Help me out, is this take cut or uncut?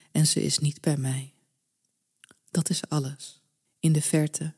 cut